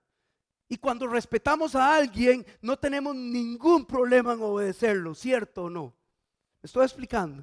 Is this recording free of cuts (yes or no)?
no